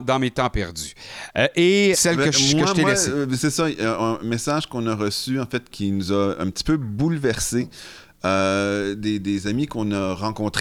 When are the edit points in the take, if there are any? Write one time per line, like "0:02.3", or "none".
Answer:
0:01.9
0:05.7